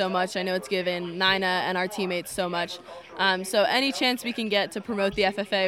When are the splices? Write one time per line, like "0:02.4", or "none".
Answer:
none